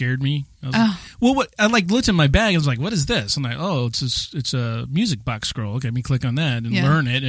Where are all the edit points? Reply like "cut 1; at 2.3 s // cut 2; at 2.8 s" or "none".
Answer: none